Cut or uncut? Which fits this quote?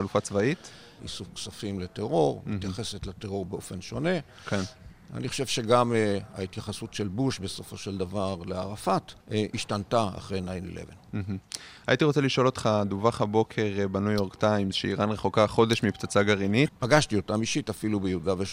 cut